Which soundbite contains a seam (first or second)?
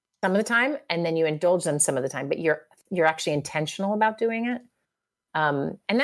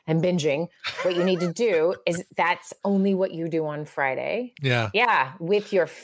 second